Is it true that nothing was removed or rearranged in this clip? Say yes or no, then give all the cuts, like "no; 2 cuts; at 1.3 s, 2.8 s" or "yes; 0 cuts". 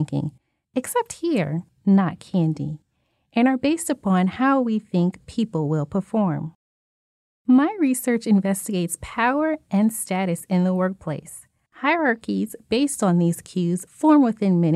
no; 2 cuts; at 1.7 s, 11.7 s